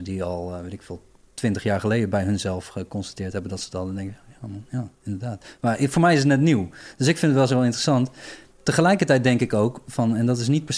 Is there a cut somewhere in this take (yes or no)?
no